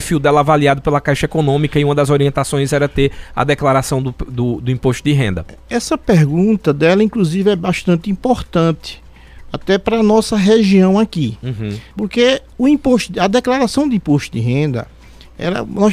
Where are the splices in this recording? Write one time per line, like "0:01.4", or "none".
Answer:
0:11.9